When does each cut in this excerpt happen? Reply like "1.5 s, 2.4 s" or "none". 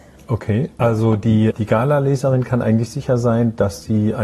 1.5 s